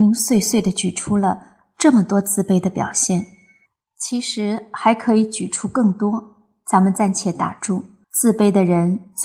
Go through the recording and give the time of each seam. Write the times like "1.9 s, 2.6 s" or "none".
8.0 s